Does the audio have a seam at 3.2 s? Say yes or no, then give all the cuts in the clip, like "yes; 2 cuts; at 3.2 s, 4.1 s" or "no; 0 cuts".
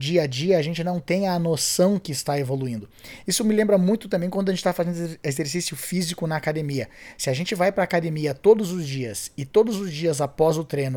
no; 0 cuts